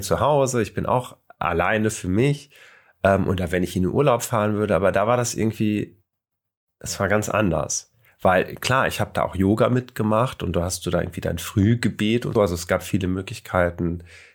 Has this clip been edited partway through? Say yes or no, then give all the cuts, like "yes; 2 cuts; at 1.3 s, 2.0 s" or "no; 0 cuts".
yes; 1 cut; at 12.4 s